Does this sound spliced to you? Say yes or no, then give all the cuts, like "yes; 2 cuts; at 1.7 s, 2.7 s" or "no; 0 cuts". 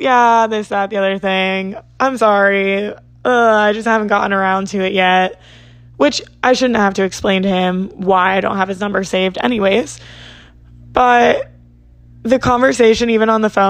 no; 0 cuts